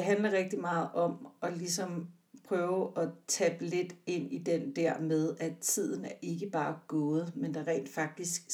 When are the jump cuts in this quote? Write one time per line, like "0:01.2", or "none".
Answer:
none